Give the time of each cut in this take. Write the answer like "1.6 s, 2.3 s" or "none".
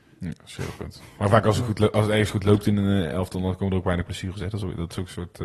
none